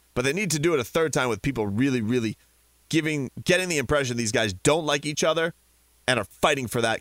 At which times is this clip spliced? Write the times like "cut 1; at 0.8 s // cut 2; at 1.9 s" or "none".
none